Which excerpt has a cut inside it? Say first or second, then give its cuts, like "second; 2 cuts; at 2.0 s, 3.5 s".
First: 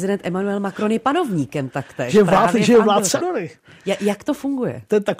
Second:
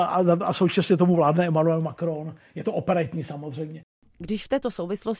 first; 1 cut; at 3.2 s